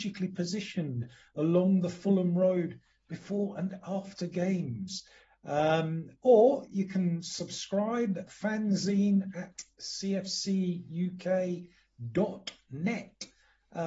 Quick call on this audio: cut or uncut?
cut